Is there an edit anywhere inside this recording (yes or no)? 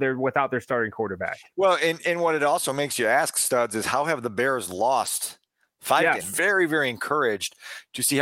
yes